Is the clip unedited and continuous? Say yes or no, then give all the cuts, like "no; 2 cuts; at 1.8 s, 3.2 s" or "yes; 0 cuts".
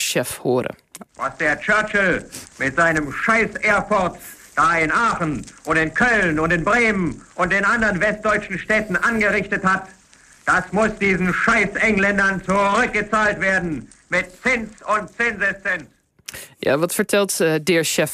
yes; 0 cuts